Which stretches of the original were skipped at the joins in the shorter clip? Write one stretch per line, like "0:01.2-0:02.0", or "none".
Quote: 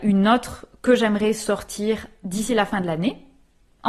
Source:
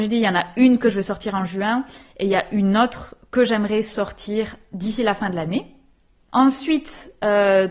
none